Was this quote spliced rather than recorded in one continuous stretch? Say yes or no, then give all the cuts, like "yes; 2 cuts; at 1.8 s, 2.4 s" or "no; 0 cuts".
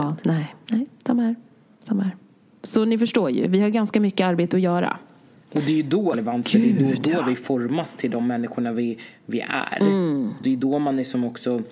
yes; 1 cut; at 6.1 s